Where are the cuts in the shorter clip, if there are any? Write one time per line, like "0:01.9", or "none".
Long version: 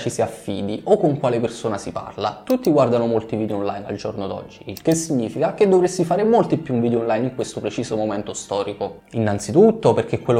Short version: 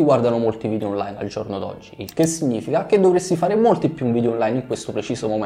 none